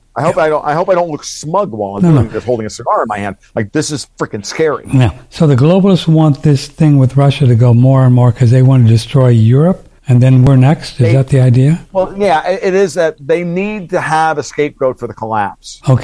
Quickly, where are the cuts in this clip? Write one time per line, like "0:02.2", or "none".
0:03.7
0:10.0